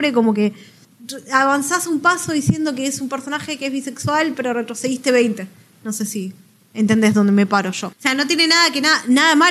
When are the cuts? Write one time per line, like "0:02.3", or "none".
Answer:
0:07.9